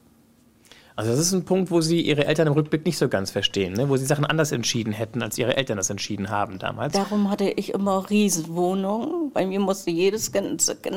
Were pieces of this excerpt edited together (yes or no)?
no